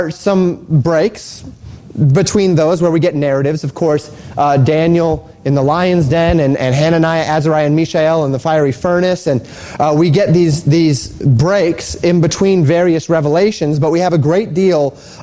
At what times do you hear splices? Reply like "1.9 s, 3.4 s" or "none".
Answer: none